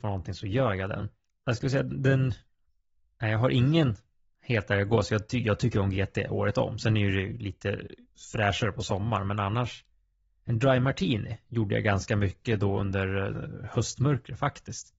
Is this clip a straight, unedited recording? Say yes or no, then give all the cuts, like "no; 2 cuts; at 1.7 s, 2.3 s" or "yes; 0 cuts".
yes; 0 cuts